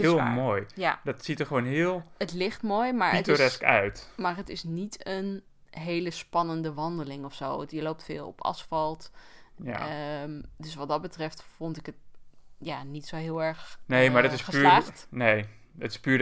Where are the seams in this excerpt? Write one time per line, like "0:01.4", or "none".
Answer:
none